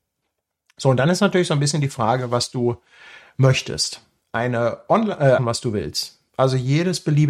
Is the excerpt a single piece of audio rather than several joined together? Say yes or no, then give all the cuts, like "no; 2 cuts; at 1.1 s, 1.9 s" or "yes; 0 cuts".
no; 1 cut; at 5.4 s